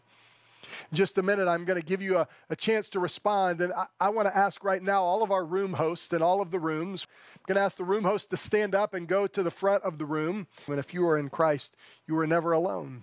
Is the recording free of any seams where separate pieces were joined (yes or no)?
no